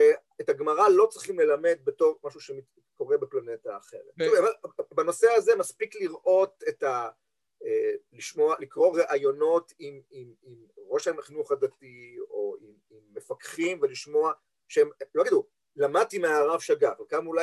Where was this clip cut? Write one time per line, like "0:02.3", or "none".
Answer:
0:04.1